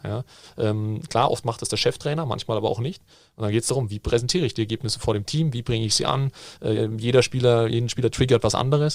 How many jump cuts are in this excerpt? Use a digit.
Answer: 1